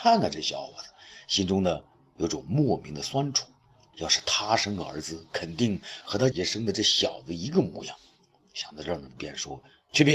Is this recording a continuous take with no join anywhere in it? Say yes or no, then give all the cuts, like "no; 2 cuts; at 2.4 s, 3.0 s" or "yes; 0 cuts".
no; 2 cuts; at 3.9 s, 6.3 s